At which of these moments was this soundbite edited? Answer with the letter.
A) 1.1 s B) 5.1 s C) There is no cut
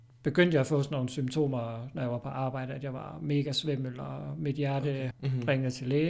B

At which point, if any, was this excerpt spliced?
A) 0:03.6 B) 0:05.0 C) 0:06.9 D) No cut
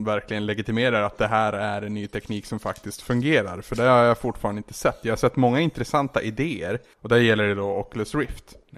C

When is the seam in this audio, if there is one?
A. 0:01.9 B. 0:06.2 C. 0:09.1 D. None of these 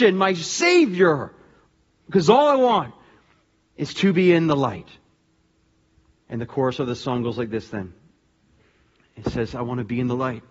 B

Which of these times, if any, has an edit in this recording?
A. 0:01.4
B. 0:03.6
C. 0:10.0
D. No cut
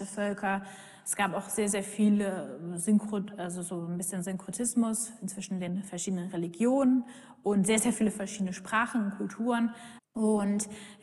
C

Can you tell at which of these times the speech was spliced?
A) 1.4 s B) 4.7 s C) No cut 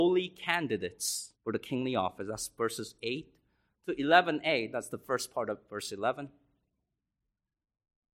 A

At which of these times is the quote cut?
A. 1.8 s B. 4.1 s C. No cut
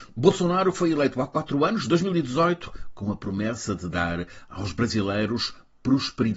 C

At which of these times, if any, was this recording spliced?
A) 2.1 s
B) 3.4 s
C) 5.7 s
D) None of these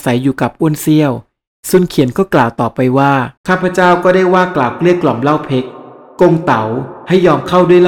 B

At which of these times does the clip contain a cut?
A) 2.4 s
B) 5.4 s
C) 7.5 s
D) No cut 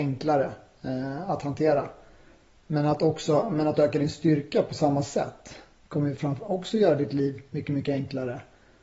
D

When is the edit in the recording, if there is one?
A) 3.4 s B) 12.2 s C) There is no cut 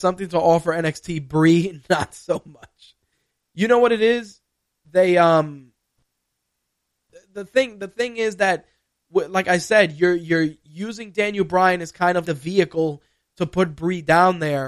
B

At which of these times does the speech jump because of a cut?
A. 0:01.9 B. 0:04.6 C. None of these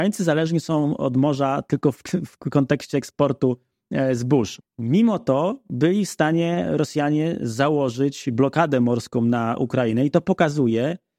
B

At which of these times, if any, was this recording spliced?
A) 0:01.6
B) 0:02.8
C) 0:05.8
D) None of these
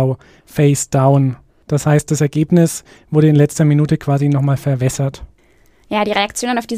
D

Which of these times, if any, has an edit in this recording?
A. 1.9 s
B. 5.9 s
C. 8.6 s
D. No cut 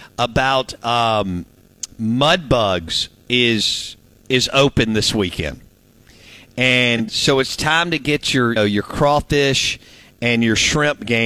C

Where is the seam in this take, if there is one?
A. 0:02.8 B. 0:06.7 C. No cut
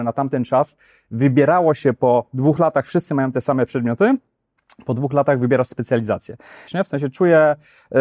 B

